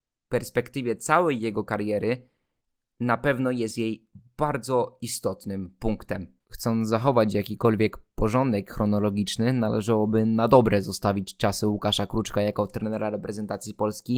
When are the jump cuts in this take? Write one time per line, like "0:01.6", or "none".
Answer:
0:06.4